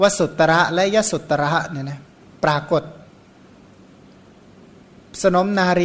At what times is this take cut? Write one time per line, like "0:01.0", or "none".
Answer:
none